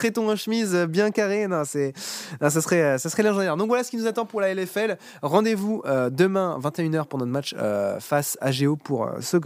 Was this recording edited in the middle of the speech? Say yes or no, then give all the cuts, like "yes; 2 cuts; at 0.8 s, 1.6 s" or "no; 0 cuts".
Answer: no; 0 cuts